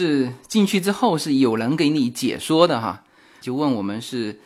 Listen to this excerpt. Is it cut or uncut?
cut